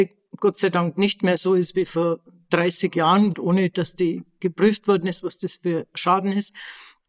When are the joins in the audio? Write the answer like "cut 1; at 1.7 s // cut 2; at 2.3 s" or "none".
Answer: cut 1; at 3.3 s